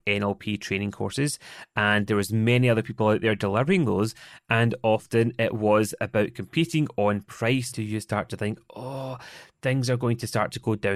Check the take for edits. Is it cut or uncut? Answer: cut